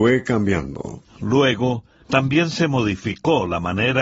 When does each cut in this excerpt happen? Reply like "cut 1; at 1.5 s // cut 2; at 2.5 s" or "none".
cut 1; at 2.0 s